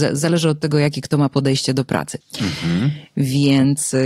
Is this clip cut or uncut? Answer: cut